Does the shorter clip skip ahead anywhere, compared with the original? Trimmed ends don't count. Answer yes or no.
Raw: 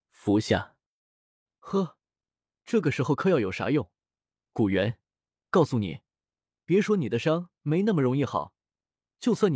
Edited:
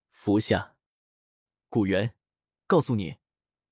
yes